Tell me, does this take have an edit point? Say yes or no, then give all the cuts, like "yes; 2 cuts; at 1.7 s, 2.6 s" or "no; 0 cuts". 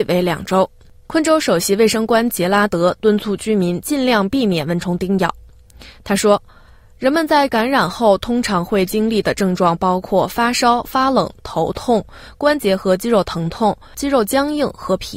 no; 0 cuts